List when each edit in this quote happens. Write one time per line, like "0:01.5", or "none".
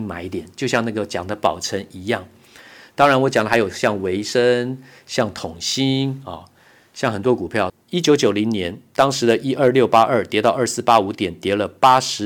0:07.7

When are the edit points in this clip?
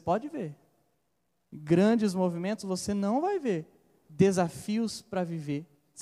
none

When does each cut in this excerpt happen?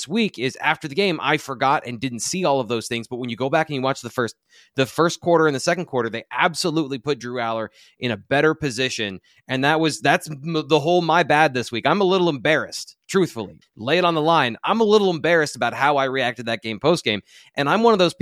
0:13.6

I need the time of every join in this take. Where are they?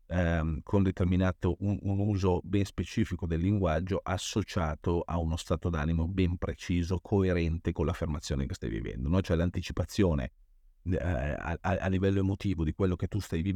0:01.8

